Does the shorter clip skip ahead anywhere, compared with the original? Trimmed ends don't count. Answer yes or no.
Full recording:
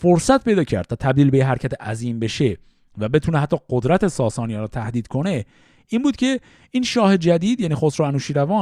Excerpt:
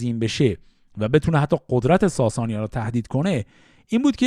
no